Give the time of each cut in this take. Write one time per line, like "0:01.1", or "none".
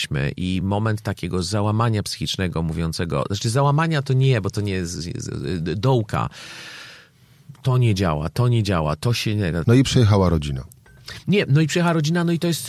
0:09.6